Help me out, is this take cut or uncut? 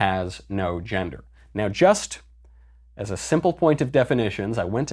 uncut